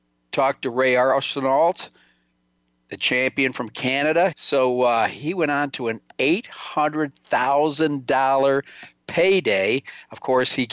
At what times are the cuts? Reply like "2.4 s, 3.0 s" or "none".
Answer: 4.3 s